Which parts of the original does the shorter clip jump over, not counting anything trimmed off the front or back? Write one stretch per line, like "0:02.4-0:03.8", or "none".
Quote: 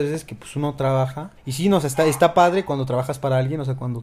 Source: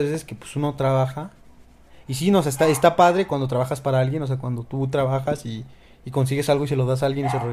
0:01.4-0:02.0